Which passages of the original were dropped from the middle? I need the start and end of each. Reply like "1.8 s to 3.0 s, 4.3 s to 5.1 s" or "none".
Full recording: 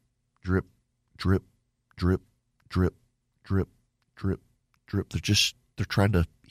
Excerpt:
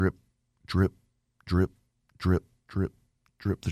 3.1 s to 4.1 s